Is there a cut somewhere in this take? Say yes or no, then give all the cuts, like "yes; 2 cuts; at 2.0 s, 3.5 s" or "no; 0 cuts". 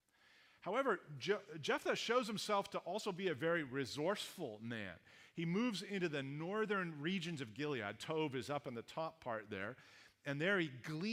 no; 0 cuts